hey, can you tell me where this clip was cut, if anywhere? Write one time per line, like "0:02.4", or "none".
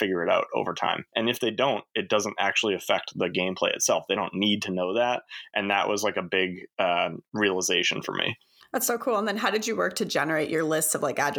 none